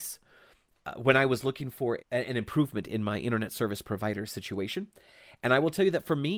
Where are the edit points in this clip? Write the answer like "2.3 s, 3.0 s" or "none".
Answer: 2.0 s